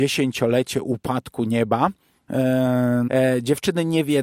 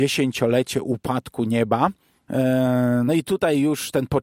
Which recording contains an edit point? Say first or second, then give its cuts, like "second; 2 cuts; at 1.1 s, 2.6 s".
first; 1 cut; at 3.1 s